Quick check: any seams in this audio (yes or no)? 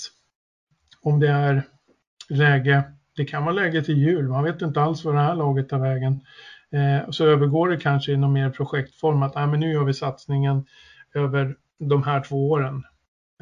no